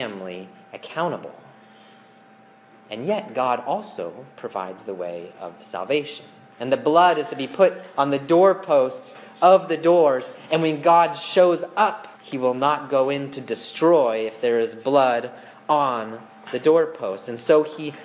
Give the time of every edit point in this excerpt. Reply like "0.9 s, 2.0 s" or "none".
6.5 s, 12.1 s